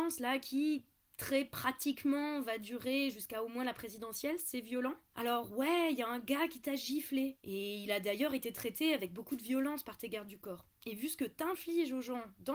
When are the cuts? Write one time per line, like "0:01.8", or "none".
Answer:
0:10.7